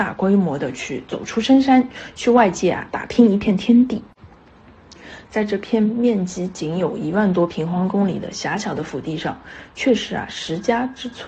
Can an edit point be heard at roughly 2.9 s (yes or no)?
yes